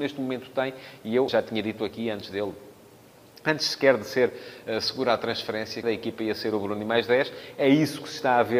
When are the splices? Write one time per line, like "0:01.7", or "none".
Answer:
0:01.3
0:05.8